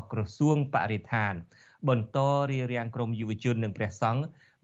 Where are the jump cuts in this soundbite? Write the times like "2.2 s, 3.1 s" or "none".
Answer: none